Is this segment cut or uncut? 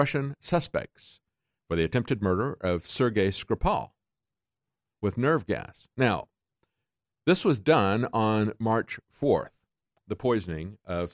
uncut